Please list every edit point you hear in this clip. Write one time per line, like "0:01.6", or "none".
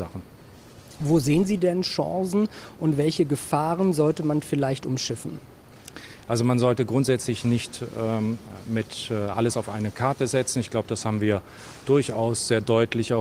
none